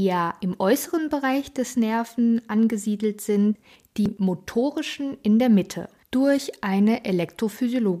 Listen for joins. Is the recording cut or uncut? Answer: cut